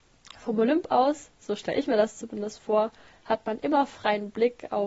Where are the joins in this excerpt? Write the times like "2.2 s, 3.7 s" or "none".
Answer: none